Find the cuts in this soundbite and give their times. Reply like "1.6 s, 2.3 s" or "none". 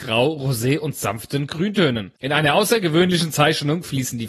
2.2 s